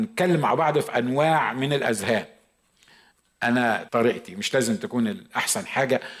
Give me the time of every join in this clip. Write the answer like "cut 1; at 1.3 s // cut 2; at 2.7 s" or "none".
cut 1; at 3.9 s